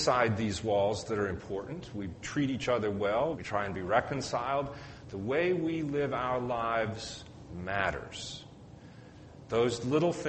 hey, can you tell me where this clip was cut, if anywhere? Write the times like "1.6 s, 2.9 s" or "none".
3.3 s, 5.0 s